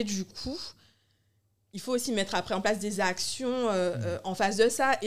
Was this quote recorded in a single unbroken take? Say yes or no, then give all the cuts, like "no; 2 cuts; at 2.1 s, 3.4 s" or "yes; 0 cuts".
yes; 0 cuts